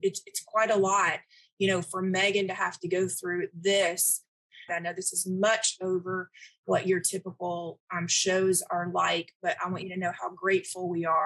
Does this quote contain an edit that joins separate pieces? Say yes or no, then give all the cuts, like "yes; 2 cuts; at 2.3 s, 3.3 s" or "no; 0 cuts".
yes; 1 cut; at 4.7 s